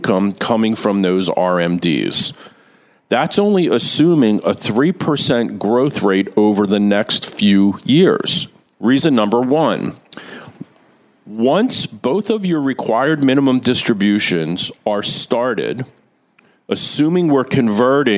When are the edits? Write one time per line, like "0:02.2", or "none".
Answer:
0:08.7